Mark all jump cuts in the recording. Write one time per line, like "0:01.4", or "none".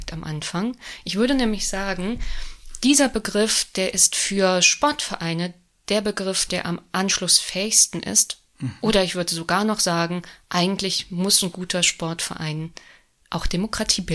none